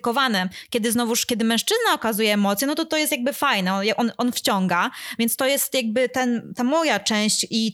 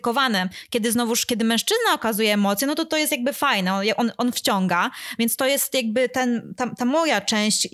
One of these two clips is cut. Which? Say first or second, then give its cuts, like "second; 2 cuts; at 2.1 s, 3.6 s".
first; 1 cut; at 6.5 s